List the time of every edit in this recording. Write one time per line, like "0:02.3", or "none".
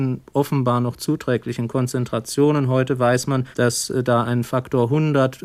0:03.5